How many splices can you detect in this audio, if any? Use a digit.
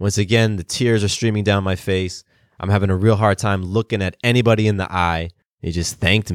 1